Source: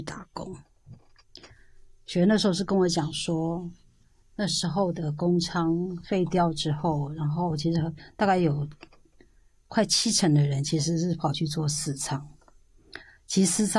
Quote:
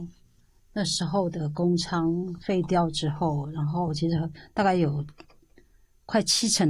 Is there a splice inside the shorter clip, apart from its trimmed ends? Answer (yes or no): no